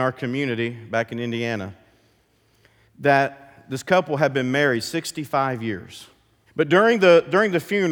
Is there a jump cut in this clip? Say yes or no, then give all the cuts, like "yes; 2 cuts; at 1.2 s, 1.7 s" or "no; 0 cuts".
yes; 1 cut; at 6.5 s